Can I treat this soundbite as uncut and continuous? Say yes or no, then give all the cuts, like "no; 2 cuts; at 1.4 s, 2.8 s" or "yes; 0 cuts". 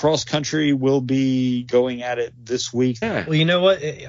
no; 1 cut; at 3.0 s